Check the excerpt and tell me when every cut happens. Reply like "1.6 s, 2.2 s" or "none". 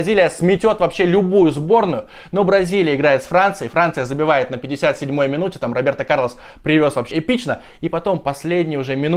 7.1 s

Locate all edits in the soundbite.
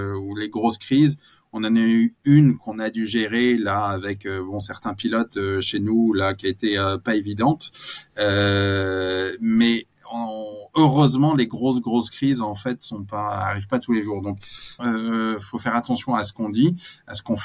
14.8 s

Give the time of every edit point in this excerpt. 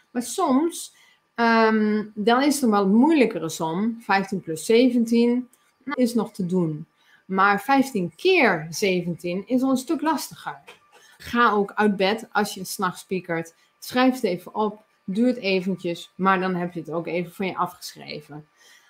5.9 s, 11.2 s

